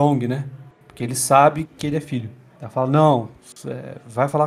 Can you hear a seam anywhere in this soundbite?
yes; 1 cut; at 1.7 s

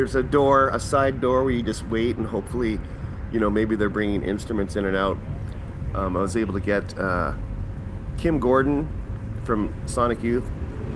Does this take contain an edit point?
no; 0 cuts

